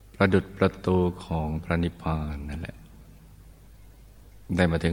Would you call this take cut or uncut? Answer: uncut